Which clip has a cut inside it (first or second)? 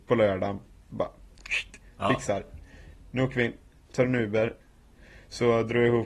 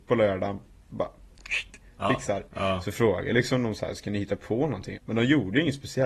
second